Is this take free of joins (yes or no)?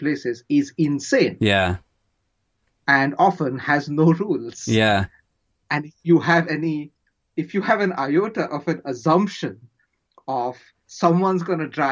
yes